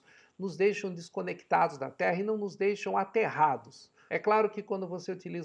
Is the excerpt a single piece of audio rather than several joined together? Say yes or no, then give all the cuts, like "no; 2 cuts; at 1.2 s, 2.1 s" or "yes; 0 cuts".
no; 1 cut; at 4.1 s